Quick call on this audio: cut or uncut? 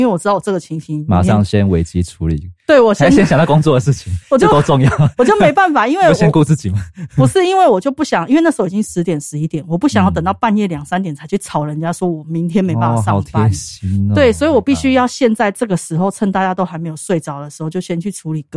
uncut